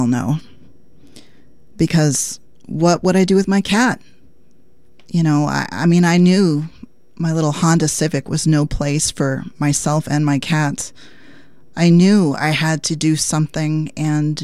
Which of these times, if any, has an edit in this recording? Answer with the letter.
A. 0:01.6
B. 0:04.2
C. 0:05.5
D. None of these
D